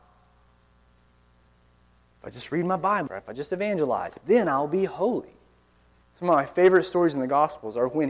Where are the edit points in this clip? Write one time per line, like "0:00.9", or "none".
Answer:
0:03.1
0:06.0